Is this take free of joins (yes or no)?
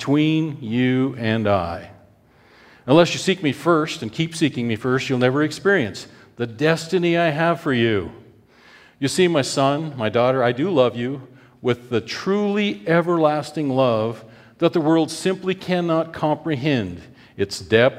yes